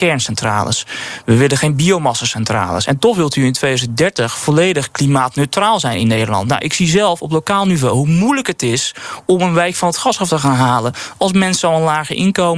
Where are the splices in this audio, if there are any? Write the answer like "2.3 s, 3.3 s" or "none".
none